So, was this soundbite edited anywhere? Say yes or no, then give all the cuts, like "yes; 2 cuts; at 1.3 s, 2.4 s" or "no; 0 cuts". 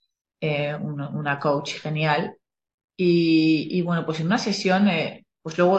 no; 0 cuts